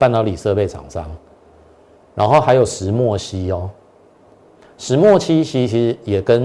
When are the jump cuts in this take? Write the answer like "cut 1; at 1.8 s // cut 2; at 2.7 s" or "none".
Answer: none